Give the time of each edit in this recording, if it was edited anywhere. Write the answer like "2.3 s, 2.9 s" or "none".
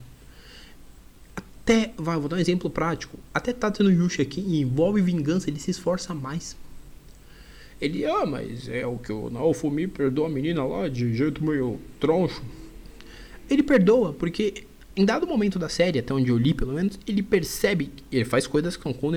none